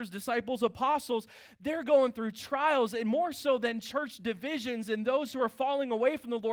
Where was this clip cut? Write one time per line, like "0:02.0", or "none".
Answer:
none